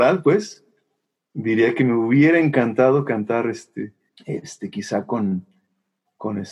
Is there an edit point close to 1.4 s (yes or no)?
no